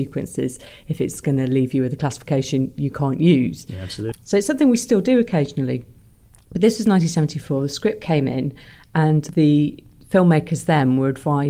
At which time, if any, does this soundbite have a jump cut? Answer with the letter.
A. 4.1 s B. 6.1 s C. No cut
A